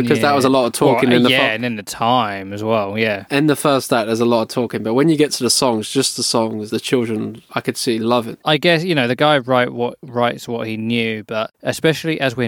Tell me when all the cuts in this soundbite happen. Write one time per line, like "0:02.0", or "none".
0:06.7
0:08.4